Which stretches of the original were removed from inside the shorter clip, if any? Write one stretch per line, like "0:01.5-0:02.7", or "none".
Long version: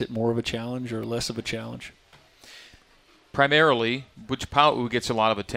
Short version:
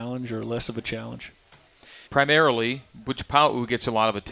0:02.7-0:03.3